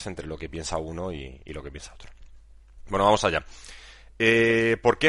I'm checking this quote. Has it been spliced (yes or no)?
no